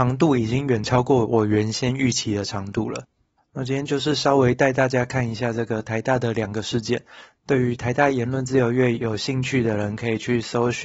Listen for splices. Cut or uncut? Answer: uncut